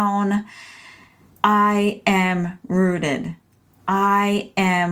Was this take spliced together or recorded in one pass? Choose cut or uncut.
cut